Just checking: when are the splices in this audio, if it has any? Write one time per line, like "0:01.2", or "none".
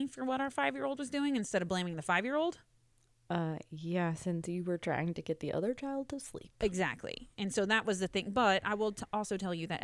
none